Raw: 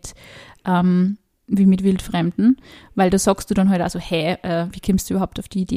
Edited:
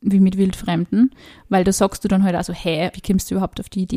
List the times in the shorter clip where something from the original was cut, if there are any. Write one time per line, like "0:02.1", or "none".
0:02.9